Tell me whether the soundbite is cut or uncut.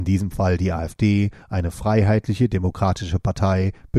uncut